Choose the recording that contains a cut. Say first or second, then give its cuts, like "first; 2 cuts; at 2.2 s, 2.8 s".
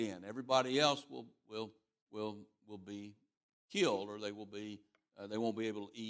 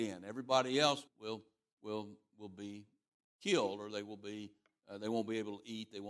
second; 1 cut; at 1.1 s